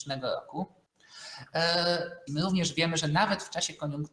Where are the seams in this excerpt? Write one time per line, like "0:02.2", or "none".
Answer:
0:02.3